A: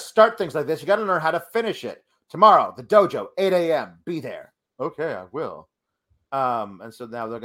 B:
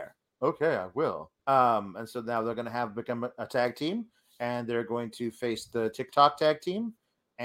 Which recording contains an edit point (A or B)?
B